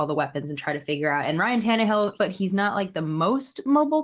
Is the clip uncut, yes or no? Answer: no